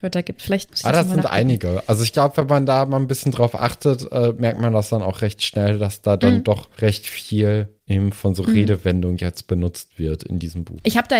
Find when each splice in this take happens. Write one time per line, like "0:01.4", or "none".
none